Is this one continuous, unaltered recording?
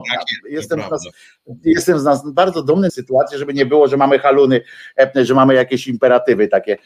no; 1 cut; at 2.9 s

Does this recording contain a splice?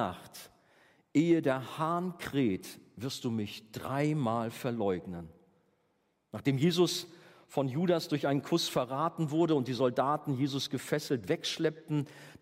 no; 0 cuts

